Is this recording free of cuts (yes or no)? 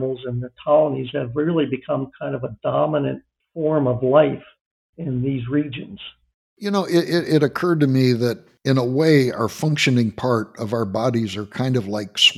yes